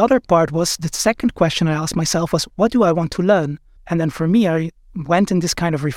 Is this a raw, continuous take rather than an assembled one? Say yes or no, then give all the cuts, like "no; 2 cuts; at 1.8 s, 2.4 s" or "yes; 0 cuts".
no; 1 cut; at 3.8 s